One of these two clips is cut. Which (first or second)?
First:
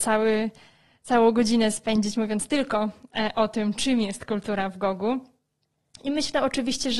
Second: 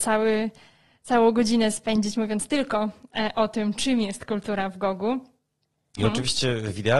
second